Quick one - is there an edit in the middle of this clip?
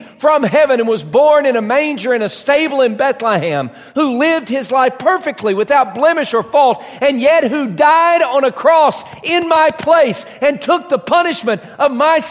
no; 0 cuts

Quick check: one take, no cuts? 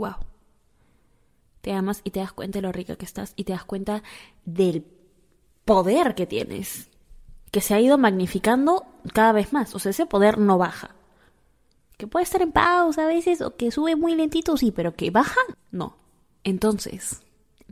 no; 1 cut; at 15.5 s

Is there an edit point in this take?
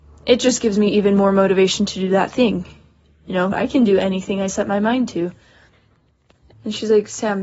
yes; 2 cuts; at 3.5 s, 6.5 s

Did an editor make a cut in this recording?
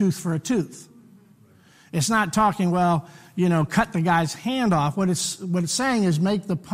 no; 0 cuts

